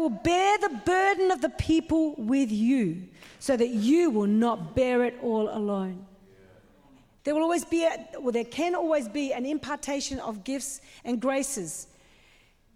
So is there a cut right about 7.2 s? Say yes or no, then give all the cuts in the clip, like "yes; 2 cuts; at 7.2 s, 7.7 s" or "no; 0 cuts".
yes; 1 cut; at 7.2 s